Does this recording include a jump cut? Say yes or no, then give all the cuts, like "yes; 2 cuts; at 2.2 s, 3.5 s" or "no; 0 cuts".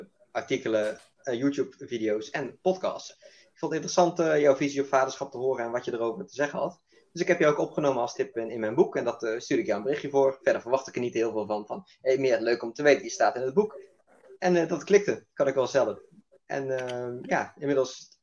yes; 1 cut; at 3.1 s